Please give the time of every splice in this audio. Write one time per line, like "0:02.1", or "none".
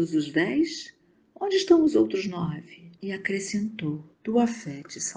0:03.0
0:04.1